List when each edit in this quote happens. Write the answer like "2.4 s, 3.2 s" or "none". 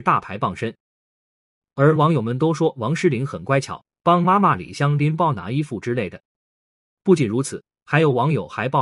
3.9 s, 6.9 s